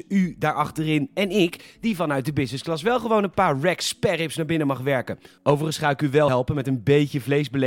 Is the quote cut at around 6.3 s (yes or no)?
yes